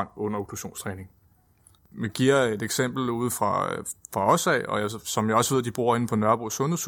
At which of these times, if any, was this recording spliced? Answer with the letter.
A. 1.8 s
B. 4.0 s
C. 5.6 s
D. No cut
A